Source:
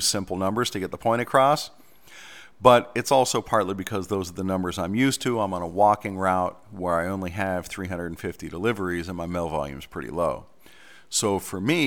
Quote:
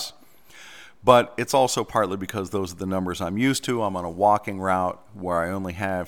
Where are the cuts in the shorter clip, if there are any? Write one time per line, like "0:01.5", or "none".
none